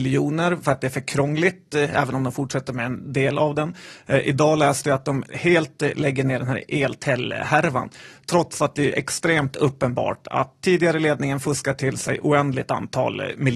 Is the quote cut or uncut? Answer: uncut